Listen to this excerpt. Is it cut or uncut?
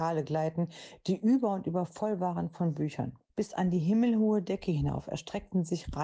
cut